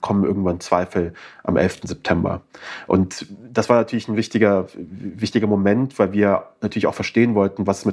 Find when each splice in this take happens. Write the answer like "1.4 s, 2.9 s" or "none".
none